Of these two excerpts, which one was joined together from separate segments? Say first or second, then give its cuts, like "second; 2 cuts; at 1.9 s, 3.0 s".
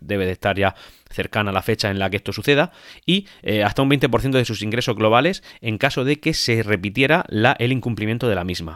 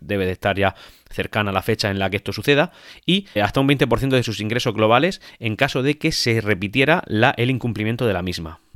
second; 1 cut; at 3.4 s